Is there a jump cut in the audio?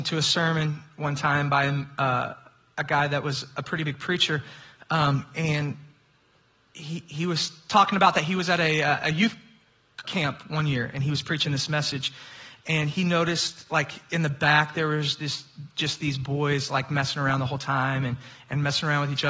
yes; 1 cut; at 10.0 s

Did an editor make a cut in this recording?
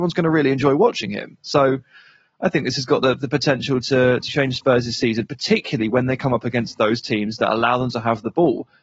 yes; 1 cut; at 4.3 s

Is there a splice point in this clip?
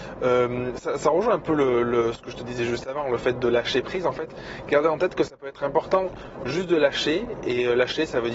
no; 0 cuts

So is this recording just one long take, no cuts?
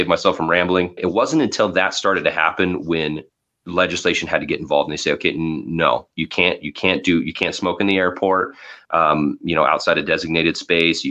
no; 1 cut; at 1.0 s

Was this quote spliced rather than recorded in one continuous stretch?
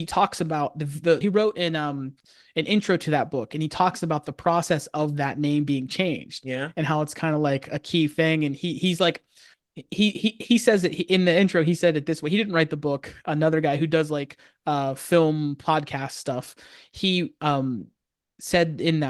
yes; 1 cut; at 1.2 s

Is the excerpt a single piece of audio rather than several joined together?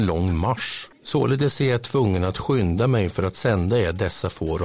no; 1 cut; at 0.9 s

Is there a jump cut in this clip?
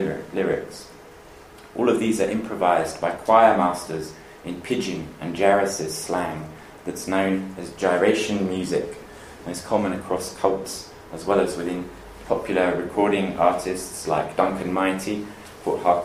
yes; 1 cut; at 12.2 s

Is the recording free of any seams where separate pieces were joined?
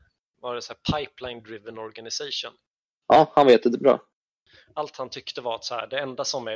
yes; 0 cuts

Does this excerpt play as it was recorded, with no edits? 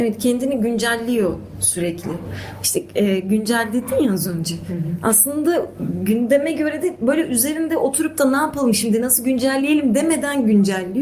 yes; 0 cuts

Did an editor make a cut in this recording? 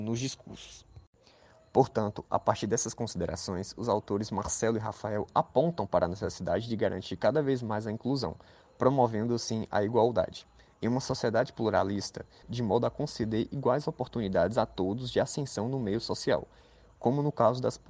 yes; 1 cut; at 12.4 s

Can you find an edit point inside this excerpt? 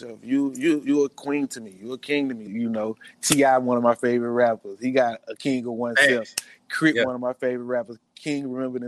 yes; 1 cut; at 2.5 s

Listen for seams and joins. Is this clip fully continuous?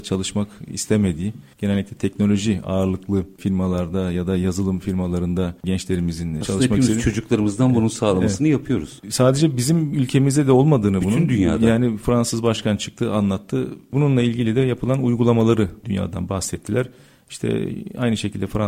no; 1 cut; at 13.9 s

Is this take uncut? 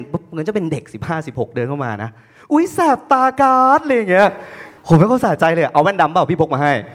no; 1 cut; at 4.8 s

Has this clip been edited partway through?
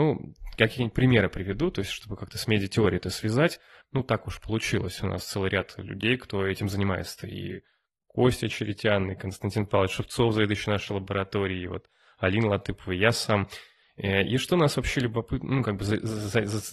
yes; 1 cut; at 3.8 s

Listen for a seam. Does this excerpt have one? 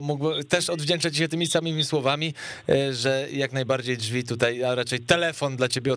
no; 0 cuts

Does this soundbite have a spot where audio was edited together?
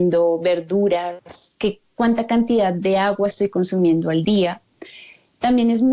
no; 0 cuts

